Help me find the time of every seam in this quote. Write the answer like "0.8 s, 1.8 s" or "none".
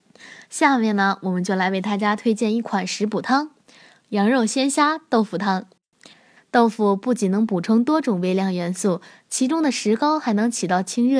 6.4 s